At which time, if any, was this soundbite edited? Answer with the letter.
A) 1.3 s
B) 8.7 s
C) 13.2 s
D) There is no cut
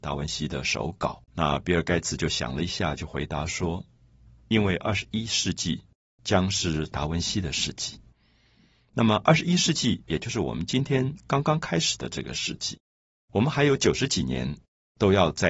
A